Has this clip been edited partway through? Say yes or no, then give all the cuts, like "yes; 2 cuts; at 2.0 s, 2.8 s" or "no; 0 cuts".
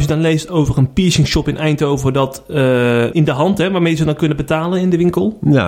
yes; 1 cut; at 3.1 s